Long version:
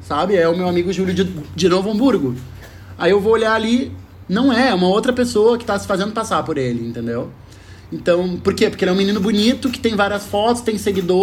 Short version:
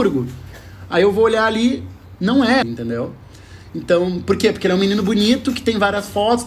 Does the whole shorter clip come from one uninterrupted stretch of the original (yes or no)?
no